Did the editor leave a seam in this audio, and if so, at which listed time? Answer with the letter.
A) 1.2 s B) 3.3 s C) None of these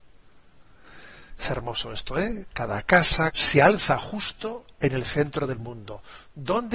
B